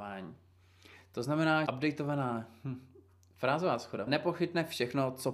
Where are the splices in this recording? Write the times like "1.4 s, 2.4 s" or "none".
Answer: 1.7 s, 4.1 s